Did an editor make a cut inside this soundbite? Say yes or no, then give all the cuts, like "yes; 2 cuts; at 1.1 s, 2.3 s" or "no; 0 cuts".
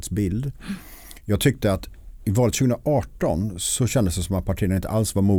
no; 0 cuts